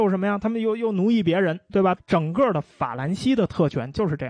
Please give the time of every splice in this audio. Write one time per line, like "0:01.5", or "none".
0:02.0